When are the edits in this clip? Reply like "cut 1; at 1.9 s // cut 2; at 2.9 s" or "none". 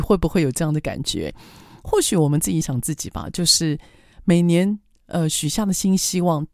cut 1; at 2.6 s